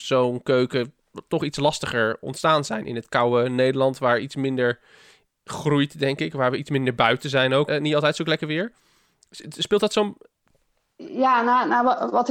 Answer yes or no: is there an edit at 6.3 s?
no